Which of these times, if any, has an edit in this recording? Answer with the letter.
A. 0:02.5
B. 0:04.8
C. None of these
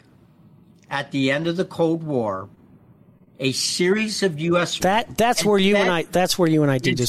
B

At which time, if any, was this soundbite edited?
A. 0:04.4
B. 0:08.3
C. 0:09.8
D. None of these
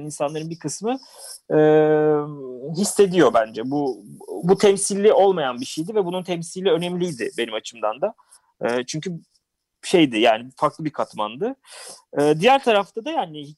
A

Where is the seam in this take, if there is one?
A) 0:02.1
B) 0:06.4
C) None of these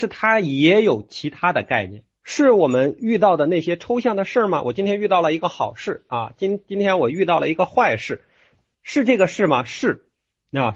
A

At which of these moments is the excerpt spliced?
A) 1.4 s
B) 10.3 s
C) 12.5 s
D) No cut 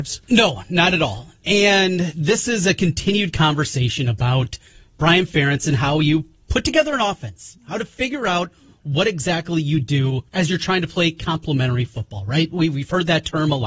B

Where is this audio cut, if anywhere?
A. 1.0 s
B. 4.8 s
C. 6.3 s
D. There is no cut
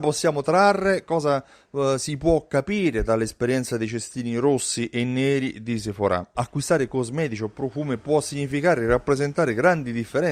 C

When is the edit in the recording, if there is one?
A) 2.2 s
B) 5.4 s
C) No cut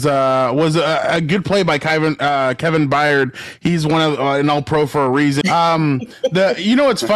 B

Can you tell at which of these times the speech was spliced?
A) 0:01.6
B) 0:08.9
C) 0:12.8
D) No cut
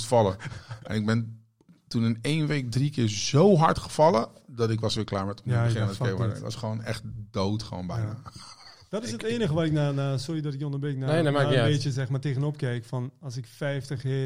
D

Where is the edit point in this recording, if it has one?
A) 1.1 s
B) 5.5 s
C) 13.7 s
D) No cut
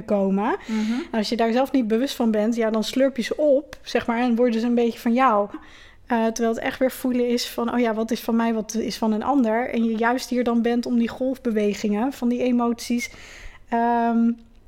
B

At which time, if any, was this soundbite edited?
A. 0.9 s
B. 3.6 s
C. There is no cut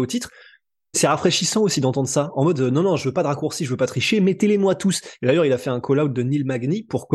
A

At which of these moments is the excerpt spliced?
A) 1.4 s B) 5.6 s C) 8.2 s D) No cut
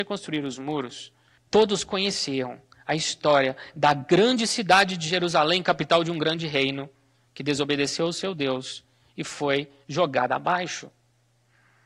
A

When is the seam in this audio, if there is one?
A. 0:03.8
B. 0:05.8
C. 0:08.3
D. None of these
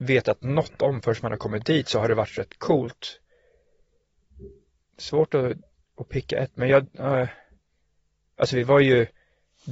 D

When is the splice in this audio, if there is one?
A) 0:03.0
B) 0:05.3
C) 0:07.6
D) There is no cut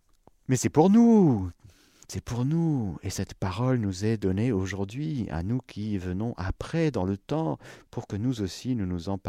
D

